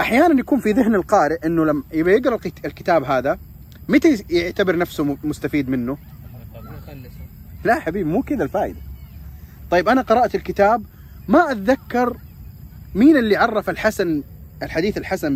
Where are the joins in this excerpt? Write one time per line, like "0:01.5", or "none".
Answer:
0:07.6